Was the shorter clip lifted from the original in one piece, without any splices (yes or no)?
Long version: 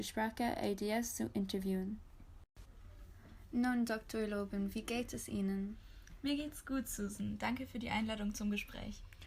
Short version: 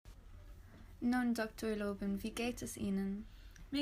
yes